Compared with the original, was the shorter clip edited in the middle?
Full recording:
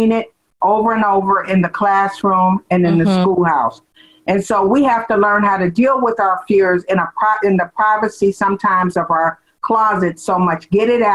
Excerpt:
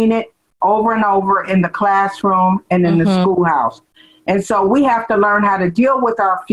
no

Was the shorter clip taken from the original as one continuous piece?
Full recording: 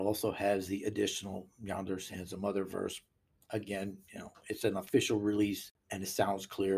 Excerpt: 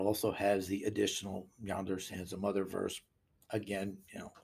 yes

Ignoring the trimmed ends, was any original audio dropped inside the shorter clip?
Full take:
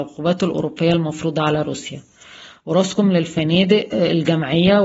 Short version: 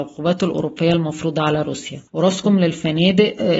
yes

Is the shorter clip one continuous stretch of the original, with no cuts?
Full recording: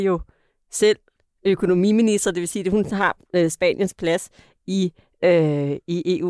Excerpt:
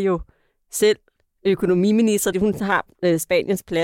no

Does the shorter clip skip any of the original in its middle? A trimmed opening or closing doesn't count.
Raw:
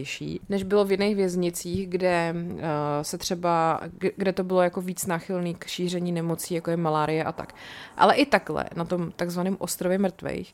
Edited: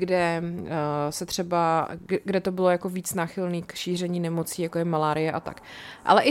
no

